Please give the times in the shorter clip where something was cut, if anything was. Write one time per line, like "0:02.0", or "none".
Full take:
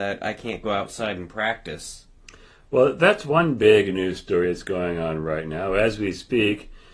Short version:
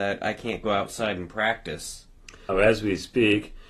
0:02.5